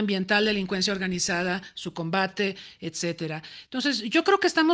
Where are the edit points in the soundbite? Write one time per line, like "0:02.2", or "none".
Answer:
none